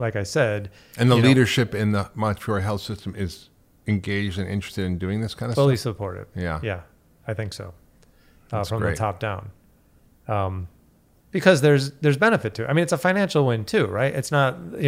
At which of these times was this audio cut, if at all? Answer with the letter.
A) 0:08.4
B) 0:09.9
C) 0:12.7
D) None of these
D